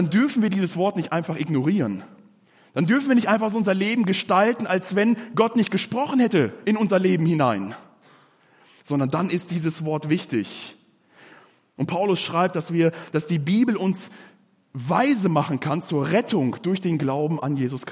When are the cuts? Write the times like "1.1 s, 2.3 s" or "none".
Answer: 11.8 s